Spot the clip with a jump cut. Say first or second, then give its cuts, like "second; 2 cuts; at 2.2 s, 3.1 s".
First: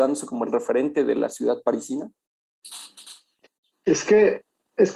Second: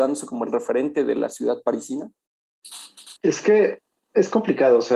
second; 1 cut; at 3.2 s